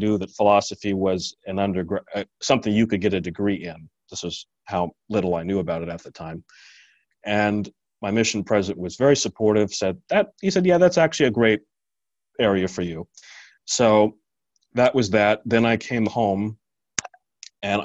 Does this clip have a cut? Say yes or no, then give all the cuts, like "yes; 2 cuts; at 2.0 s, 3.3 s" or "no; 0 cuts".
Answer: no; 0 cuts